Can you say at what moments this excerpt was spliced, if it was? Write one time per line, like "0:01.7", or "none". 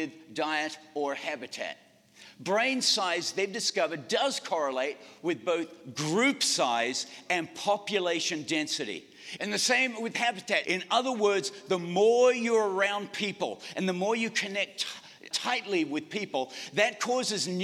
0:09.4
0:10.6
0:15.3